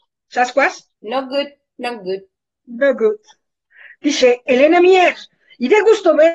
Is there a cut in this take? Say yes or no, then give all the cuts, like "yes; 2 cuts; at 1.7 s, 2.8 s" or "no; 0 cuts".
yes; 1 cut; at 0.9 s